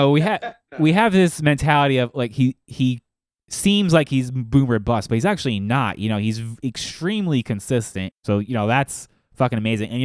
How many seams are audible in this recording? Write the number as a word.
one